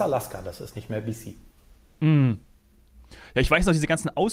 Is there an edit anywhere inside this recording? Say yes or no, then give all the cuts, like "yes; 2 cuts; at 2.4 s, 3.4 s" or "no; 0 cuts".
no; 0 cuts